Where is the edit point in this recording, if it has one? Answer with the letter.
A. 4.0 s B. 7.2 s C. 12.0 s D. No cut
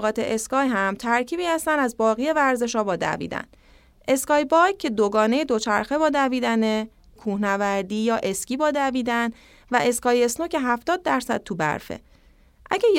B